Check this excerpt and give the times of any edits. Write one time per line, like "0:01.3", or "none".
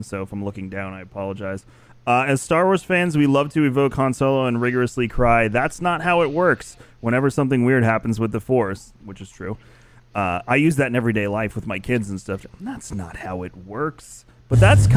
none